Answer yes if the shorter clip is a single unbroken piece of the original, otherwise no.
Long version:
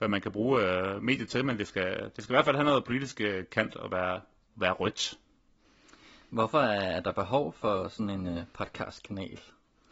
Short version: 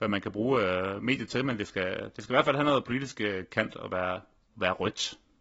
yes